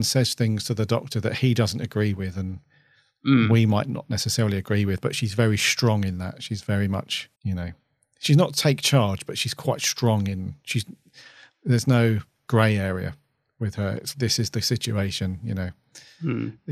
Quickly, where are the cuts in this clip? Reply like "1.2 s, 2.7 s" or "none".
7.3 s, 14.1 s